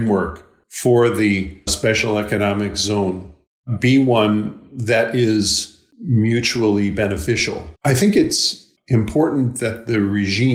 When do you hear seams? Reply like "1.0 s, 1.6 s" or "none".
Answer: 1.7 s, 7.8 s